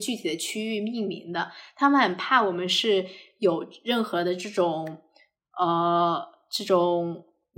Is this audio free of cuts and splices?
yes; 0 cuts

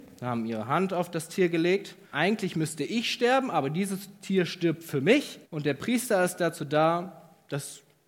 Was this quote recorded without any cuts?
no; 2 cuts; at 2.1 s, 5.4 s

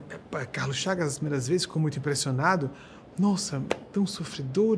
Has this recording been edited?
no; 0 cuts

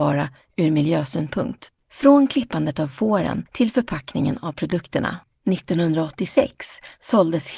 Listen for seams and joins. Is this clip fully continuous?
no; 1 cut; at 5.3 s

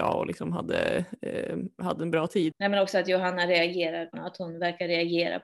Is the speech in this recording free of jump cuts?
no; 2 cuts; at 2.5 s, 4.1 s

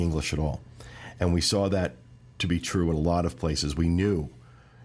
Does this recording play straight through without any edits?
yes; 0 cuts

